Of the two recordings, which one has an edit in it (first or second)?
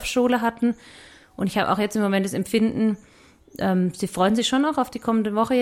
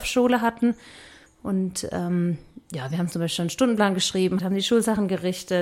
second